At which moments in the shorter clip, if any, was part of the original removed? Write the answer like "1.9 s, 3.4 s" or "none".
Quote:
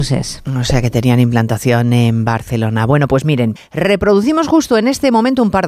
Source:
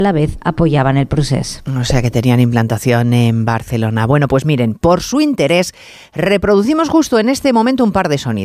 3.6 s